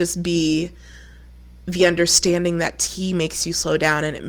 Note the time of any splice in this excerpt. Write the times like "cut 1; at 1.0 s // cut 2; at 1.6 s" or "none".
none